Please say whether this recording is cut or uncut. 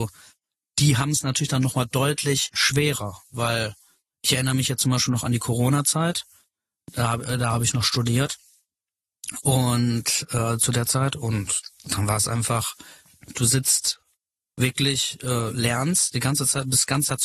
uncut